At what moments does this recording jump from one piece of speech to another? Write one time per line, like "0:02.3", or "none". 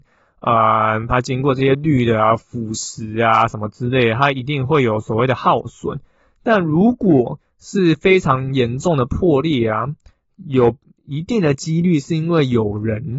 0:01.1